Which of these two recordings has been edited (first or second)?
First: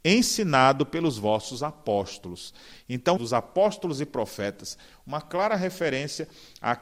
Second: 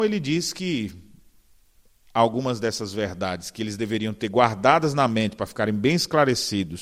first